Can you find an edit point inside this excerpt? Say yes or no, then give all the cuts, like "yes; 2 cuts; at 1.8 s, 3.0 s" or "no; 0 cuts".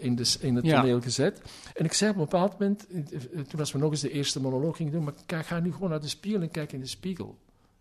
no; 0 cuts